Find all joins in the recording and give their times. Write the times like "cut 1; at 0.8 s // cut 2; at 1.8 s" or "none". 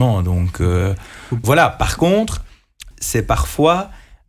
cut 1; at 1.4 s // cut 2; at 2.9 s